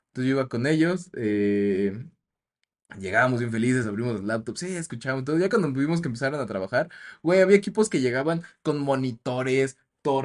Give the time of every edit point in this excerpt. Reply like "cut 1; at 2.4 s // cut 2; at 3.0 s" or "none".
none